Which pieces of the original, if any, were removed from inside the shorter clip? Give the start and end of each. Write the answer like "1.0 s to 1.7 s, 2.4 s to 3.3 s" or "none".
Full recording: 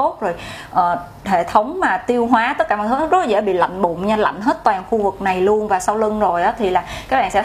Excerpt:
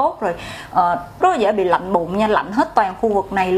1.2 s to 3.1 s